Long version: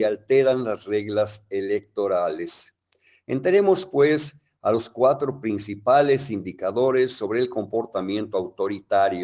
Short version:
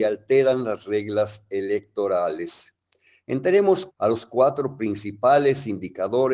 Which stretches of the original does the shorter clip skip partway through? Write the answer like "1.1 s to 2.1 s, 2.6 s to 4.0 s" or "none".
3.9 s to 4.5 s